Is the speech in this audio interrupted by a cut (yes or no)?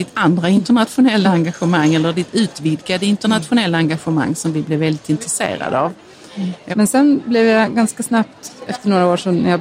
yes